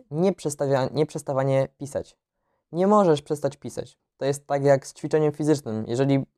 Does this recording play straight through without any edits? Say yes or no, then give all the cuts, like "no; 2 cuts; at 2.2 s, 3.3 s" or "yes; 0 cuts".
no; 1 cut; at 4.0 s